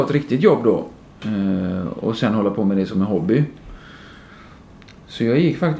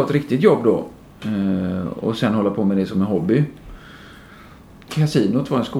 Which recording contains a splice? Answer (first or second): second